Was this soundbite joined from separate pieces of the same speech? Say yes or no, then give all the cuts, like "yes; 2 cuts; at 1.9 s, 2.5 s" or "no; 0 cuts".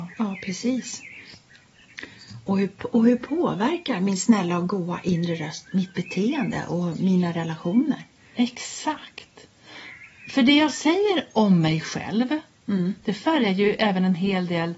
no; 0 cuts